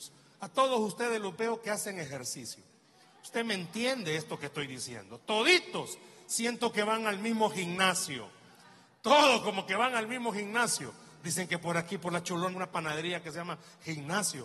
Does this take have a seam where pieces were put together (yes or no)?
yes